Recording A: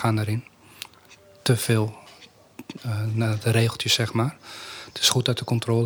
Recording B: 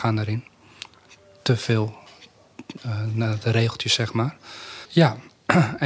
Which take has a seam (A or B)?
B